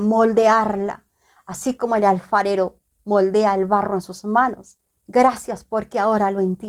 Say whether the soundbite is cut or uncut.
uncut